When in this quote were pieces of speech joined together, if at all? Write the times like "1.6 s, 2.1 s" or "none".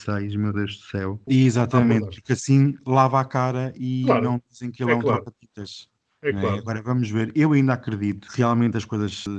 1.3 s